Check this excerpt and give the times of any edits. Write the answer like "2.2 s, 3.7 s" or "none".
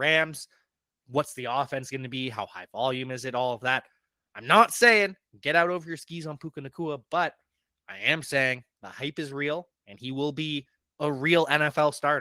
none